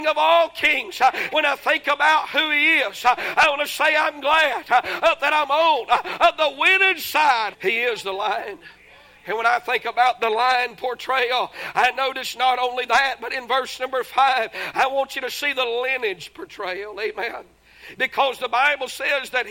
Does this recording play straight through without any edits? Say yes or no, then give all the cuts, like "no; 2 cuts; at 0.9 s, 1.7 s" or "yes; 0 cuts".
no; 2 cuts; at 1.3 s, 7.5 s